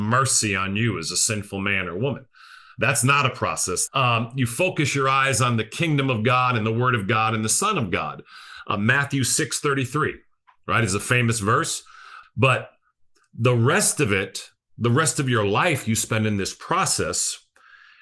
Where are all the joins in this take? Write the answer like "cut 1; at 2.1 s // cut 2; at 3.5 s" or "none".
cut 1; at 3.9 s // cut 2; at 12.2 s